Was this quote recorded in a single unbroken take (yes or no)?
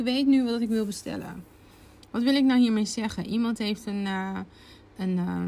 yes